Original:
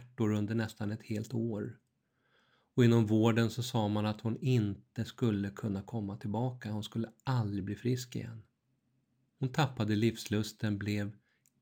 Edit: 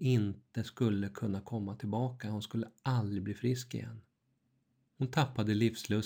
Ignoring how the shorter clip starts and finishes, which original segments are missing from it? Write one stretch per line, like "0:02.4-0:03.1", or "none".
none